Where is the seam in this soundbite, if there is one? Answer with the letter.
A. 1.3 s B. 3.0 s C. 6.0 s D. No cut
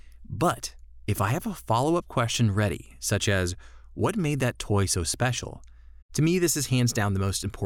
C